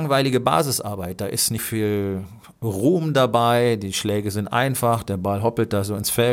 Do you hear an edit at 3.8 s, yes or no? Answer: no